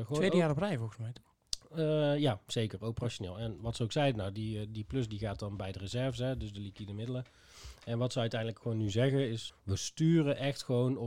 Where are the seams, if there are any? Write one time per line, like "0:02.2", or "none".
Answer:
0:09.5